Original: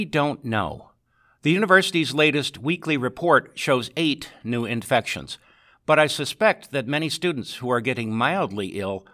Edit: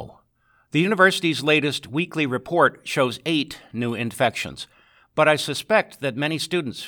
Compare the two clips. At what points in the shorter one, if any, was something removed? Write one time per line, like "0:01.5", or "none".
none